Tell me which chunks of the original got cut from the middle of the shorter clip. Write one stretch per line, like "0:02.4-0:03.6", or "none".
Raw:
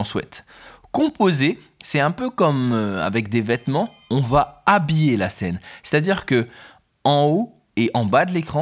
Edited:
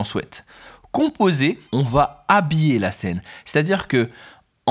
0:01.7-0:04.0